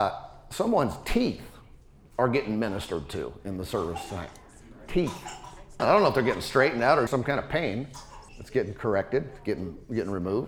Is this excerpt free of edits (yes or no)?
no